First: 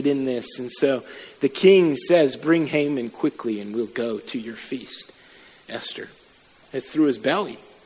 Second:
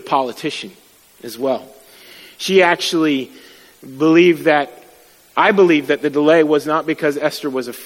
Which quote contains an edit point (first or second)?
first